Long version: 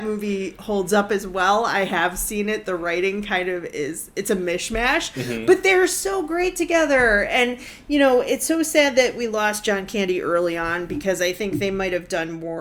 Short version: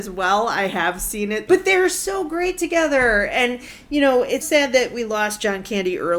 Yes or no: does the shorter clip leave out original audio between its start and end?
yes